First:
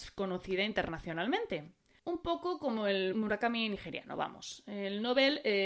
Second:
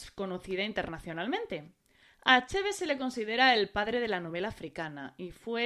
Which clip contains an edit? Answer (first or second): first